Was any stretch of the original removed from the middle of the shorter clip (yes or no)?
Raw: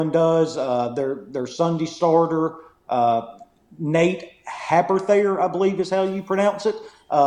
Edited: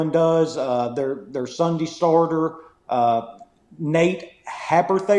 no